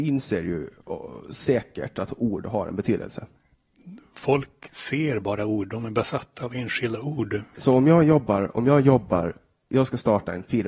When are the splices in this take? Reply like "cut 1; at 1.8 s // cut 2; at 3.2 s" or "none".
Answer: cut 1; at 7.5 s

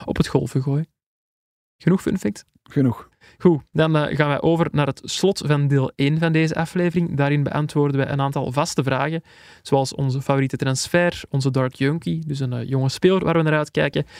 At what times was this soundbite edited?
none

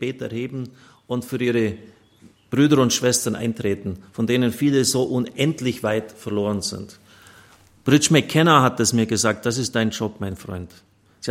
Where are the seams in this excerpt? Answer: none

